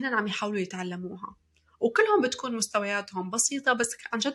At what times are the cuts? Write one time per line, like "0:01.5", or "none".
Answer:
none